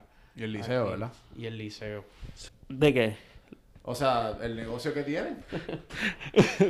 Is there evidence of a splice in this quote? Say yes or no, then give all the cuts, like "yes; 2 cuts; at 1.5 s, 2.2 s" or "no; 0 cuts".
yes; 2 cuts; at 2.5 s, 5.4 s